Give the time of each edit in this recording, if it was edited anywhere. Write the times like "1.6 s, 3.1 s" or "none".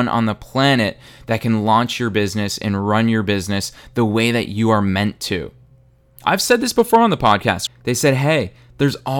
7.7 s